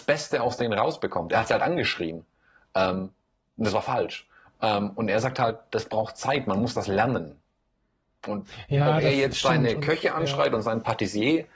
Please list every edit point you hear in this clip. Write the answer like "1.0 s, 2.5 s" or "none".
none